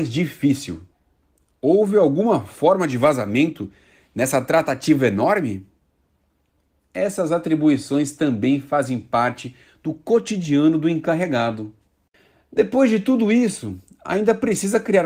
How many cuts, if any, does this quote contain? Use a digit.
0